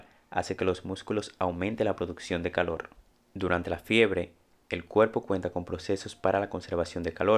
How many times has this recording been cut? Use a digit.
0